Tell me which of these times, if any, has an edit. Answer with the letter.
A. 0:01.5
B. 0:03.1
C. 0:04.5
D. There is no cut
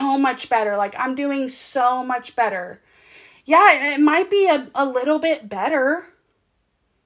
D